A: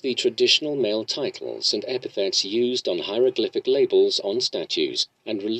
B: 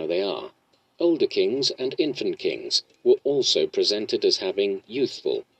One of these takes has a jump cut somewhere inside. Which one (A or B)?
B